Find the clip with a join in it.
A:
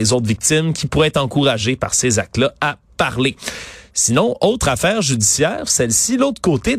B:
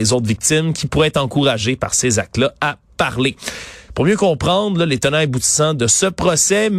B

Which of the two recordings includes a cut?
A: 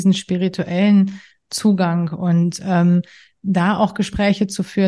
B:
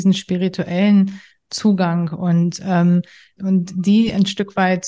B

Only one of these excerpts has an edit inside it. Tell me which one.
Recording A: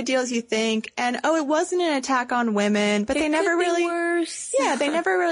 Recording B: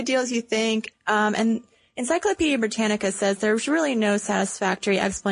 B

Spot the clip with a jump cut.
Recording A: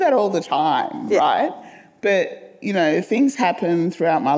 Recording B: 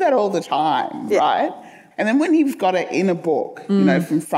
B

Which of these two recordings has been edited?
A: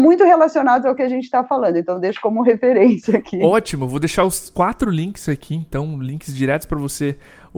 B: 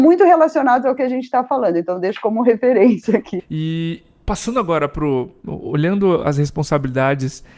B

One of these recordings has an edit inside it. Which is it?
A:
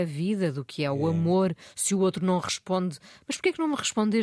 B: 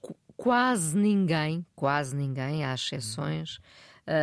A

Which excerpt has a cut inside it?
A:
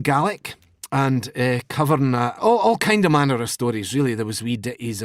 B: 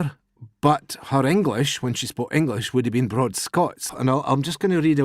B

